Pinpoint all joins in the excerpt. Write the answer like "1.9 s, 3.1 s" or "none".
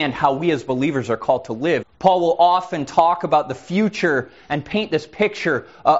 1.8 s